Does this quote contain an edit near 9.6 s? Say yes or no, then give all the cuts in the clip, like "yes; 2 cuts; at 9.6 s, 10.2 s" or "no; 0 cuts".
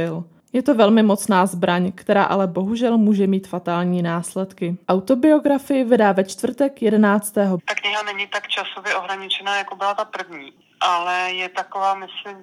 no; 2 cuts; at 4.8 s, 7.6 s